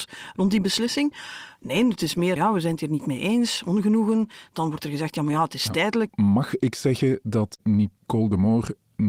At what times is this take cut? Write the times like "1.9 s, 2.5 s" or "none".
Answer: 2.4 s, 6.1 s